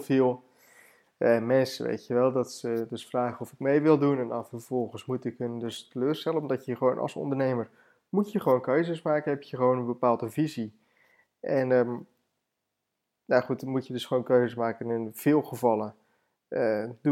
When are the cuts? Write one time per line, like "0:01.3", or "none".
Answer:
none